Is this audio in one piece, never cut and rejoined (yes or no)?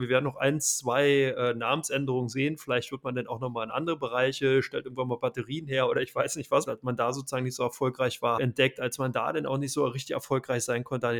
no